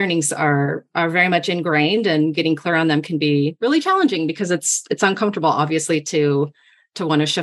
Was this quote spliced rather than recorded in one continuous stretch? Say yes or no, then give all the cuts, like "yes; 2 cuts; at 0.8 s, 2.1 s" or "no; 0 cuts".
no; 0 cuts